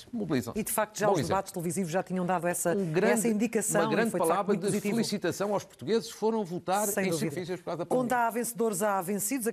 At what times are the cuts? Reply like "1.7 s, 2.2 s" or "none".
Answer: 7.3 s